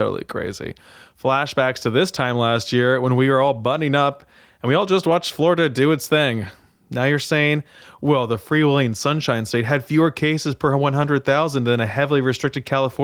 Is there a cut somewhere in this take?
no; 0 cuts

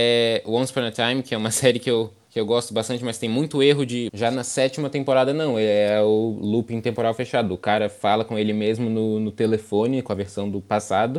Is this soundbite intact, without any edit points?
no; 1 cut; at 4.1 s

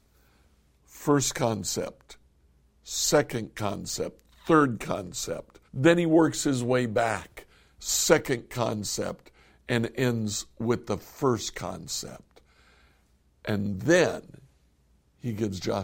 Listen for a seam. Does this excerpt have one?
yes; 1 cut; at 5.7 s

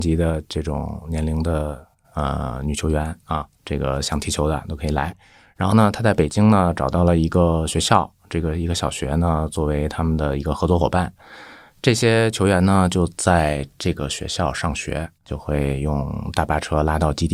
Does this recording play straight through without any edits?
no; 1 cut; at 15.2 s

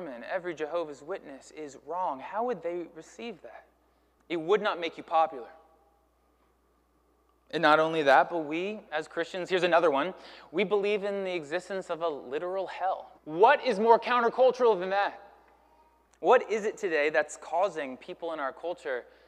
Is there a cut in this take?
yes; 3 cuts; at 4.2 s, 13.2 s, 16.1 s

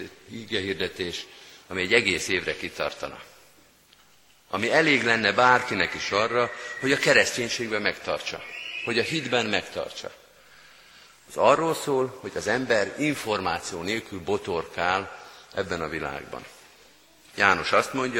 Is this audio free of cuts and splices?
yes; 0 cuts

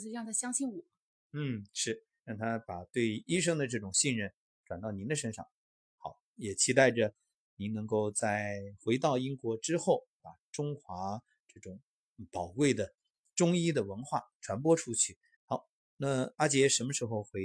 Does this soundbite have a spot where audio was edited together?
yes; 3 cuts; at 6.3 s, 10.2 s, 15.4 s

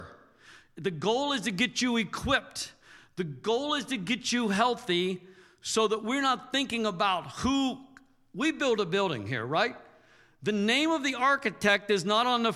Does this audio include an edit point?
no; 0 cuts

